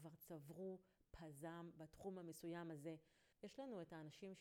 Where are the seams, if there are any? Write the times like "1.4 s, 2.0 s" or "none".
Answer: 3.3 s